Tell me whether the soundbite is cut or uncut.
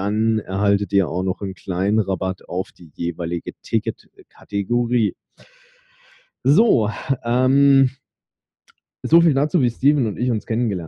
uncut